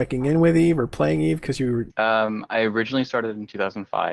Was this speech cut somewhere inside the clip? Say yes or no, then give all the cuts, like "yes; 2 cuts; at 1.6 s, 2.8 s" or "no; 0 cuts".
yes; 1 cut; at 1.9 s